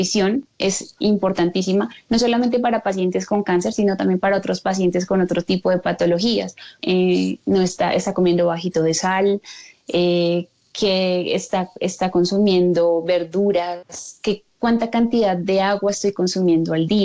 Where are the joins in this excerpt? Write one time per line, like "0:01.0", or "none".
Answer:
0:06.8